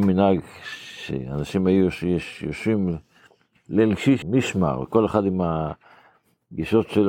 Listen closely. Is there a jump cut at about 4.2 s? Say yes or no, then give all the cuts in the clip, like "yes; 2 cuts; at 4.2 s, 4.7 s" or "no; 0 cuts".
yes; 1 cut; at 4.2 s